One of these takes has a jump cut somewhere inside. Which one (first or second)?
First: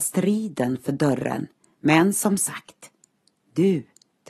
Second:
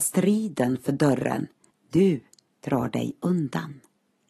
second